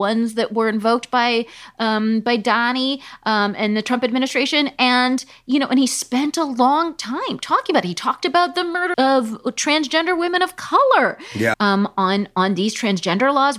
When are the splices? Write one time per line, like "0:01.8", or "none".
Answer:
0:08.9
0:11.5